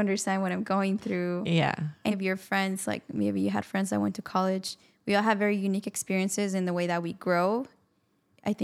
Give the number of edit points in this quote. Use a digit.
1